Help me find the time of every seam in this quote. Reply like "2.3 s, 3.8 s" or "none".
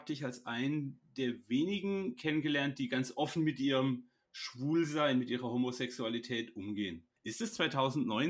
7.2 s